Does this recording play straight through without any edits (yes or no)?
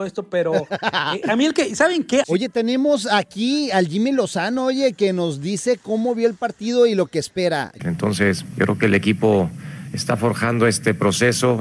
no